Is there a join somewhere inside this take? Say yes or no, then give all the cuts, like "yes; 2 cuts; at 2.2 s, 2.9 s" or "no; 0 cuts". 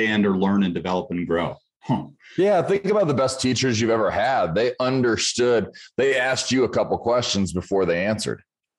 no; 0 cuts